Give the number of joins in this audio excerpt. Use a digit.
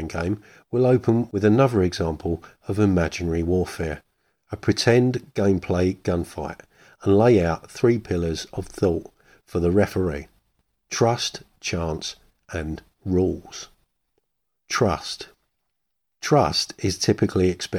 0